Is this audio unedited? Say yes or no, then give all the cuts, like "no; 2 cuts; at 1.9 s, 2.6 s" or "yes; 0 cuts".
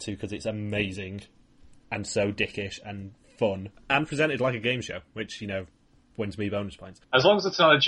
yes; 0 cuts